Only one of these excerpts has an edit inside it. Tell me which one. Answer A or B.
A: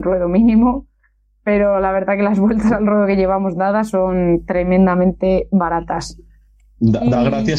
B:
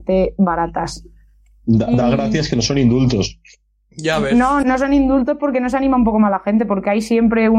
B